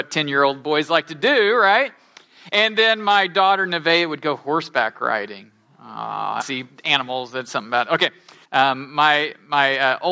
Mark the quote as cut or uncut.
cut